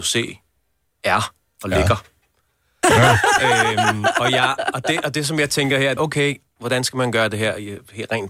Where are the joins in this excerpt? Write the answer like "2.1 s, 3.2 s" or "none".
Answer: 2.8 s, 6.0 s